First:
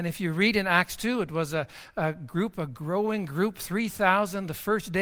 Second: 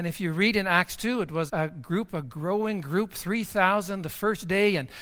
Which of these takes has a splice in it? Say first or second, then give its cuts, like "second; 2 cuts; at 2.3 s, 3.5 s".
second; 1 cut; at 1.5 s